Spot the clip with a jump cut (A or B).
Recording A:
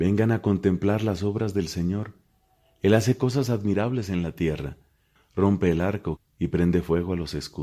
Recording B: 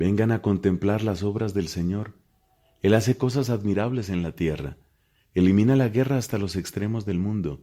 A